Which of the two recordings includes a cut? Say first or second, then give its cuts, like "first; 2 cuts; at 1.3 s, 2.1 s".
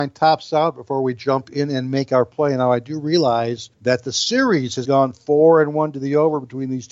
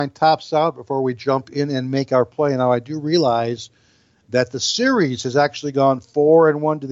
first; 2 cuts; at 3.7 s, 4.8 s